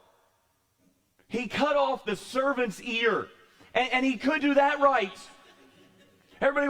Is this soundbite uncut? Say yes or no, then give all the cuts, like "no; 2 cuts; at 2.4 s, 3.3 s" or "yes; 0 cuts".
no; 1 cut; at 4.4 s